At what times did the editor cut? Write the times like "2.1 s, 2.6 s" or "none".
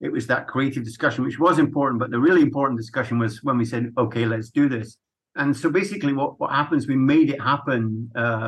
none

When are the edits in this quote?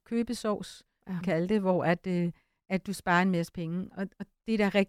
1.2 s

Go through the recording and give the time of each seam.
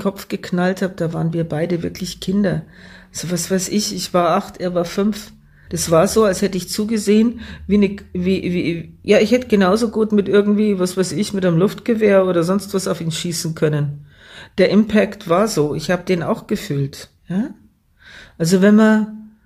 5.7 s

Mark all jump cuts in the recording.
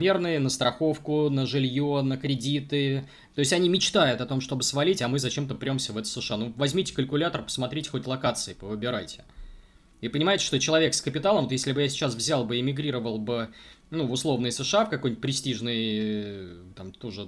3.3 s

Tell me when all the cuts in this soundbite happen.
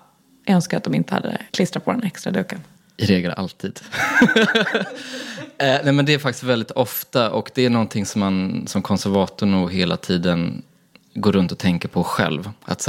1.5 s

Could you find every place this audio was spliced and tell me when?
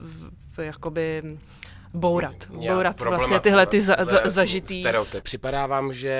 1.9 s, 5.2 s

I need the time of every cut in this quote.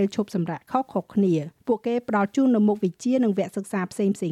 1.6 s

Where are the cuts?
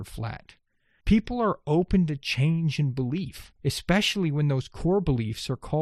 1.0 s, 3.6 s

